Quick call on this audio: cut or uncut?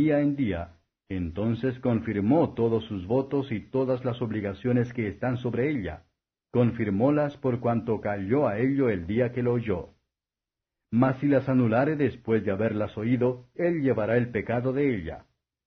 cut